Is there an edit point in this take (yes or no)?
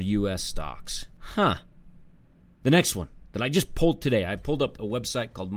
no